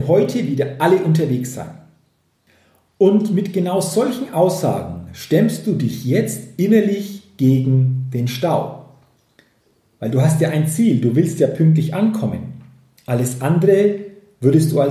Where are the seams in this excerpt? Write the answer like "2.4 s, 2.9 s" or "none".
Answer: none